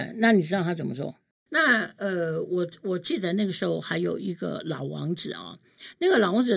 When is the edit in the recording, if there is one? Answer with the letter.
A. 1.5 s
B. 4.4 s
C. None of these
A